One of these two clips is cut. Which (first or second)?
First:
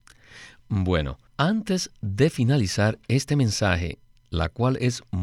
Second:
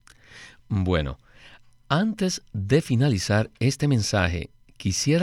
first